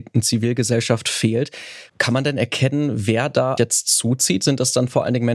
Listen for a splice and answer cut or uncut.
cut